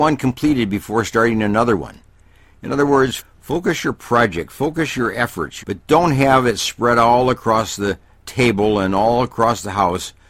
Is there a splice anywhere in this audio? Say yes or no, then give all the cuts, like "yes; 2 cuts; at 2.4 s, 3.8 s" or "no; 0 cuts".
yes; 2 cuts; at 3.2 s, 5.6 s